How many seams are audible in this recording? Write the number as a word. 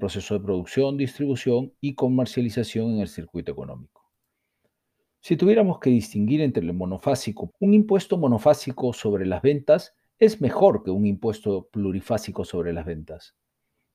one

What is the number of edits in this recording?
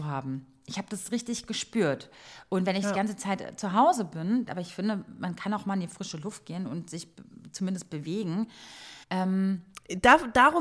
two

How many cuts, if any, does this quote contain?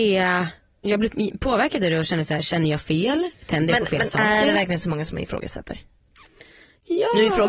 zero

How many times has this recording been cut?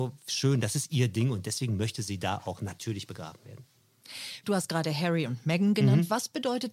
one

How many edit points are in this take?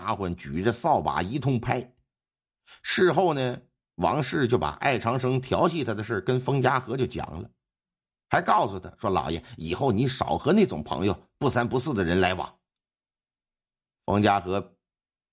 zero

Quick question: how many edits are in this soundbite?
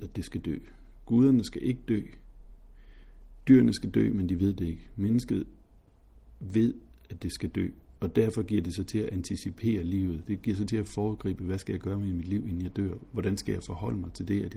zero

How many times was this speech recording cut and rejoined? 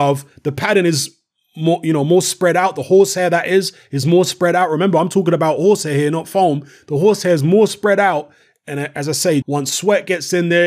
one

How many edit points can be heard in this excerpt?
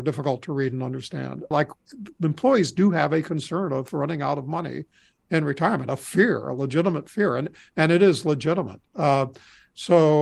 one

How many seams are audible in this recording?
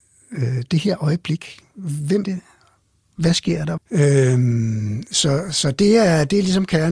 two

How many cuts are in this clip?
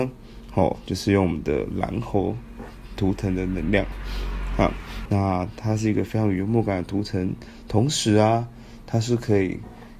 one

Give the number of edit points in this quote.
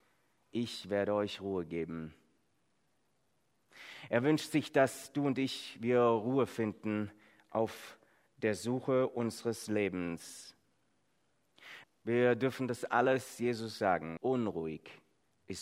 two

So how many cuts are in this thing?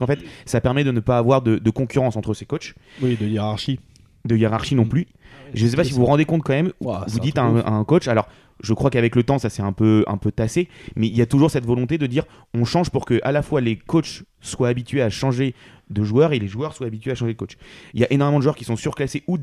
one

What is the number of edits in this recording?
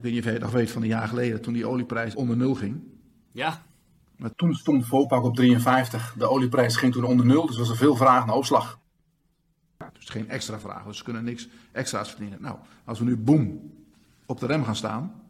two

